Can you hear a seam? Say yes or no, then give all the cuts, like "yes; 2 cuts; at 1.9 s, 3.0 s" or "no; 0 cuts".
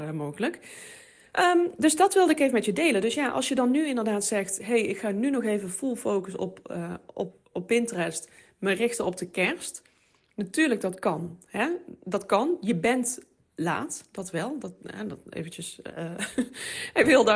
no; 0 cuts